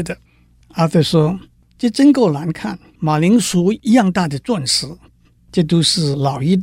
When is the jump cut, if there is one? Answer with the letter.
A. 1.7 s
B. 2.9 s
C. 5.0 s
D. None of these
B